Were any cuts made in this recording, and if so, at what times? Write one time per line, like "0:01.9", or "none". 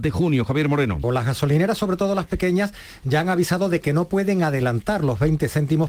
0:01.0